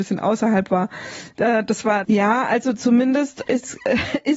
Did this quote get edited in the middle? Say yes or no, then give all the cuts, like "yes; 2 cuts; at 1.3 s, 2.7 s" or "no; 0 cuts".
yes; 2 cuts; at 2.0 s, 3.4 s